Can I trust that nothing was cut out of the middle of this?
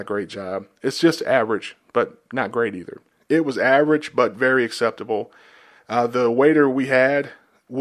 no; 2 cuts; at 1.8 s, 3.1 s

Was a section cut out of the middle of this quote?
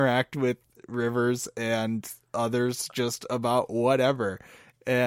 no; 0 cuts

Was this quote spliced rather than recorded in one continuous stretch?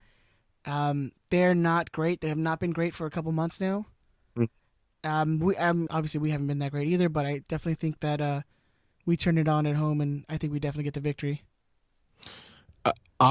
yes; 1 cut; at 5.9 s

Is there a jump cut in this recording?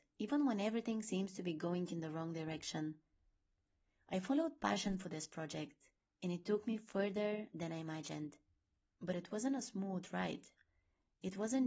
no; 0 cuts

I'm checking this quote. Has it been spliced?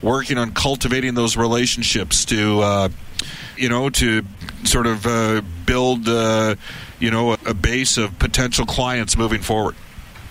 yes; 2 cuts; at 3.6 s, 7.3 s

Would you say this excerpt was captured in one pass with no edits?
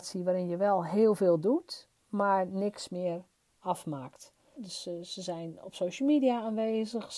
no; 1 cut; at 4.6 s

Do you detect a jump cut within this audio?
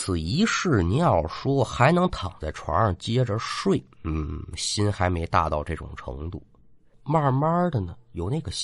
yes; 1 cut; at 6.9 s

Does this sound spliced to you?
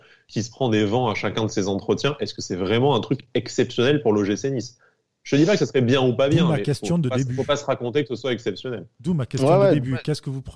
no; 0 cuts

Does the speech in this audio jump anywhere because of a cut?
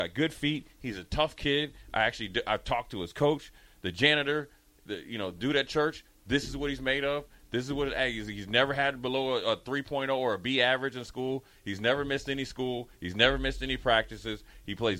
no; 0 cuts

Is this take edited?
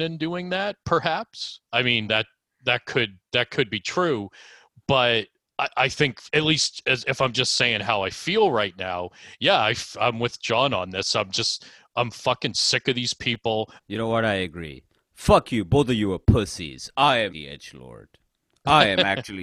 yes; 2 cuts; at 13.8 s, 17.3 s

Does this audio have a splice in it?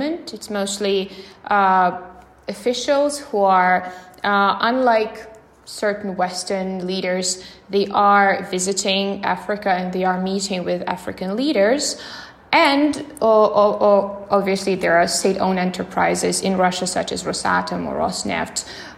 no; 0 cuts

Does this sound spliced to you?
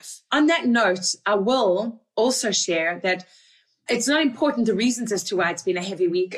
no; 0 cuts

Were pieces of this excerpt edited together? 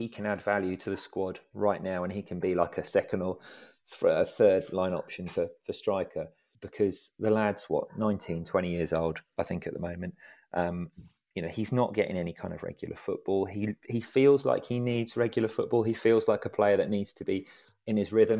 yes; 1 cut; at 6.5 s

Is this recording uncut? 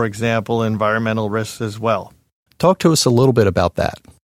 no; 1 cut; at 2.5 s

